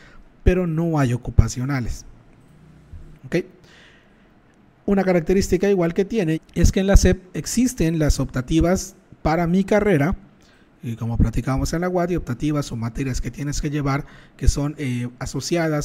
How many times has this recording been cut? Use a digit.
2